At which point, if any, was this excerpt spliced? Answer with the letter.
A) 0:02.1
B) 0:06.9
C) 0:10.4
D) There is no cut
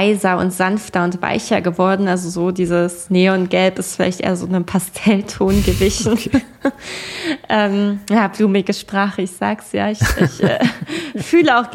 D